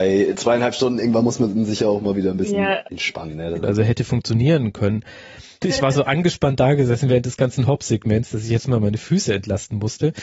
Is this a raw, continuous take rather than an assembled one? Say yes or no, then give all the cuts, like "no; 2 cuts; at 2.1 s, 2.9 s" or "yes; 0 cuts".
no; 2 cuts; at 3.6 s, 5.6 s